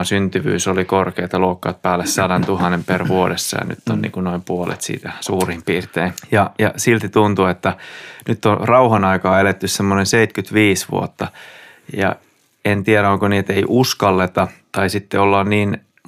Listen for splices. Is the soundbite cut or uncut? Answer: uncut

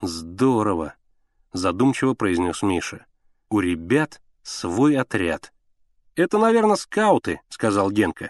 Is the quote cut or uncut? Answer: uncut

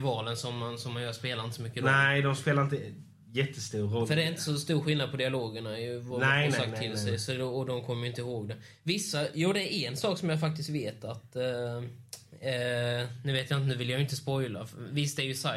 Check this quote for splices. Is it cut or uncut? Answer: uncut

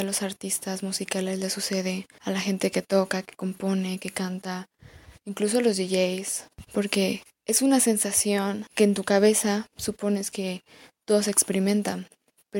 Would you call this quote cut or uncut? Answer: uncut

